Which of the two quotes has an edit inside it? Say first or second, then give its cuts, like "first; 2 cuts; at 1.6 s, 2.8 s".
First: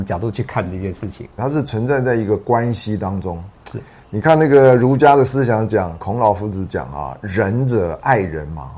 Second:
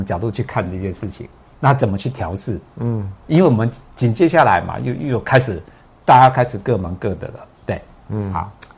first; 1 cut; at 1.4 s